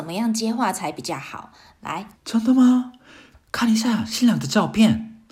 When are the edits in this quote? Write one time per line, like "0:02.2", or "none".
0:02.1